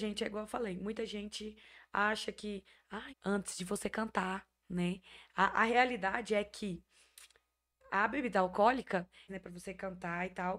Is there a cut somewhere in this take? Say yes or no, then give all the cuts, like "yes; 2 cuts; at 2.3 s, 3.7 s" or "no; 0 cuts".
yes; 2 cuts; at 3.1 s, 9.3 s